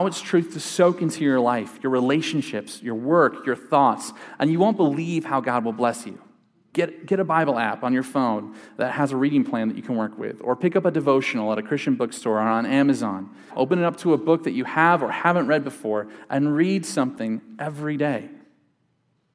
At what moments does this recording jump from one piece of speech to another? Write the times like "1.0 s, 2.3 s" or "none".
6.7 s, 13.5 s